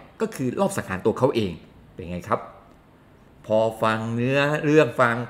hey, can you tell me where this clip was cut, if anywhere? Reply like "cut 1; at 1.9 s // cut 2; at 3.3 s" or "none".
none